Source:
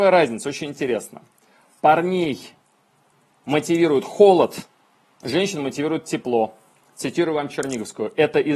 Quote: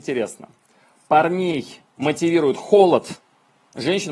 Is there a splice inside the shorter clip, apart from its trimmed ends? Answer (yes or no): yes